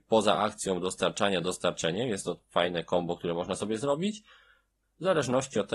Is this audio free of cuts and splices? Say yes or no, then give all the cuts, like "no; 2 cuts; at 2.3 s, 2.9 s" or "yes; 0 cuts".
no; 1 cut; at 4.8 s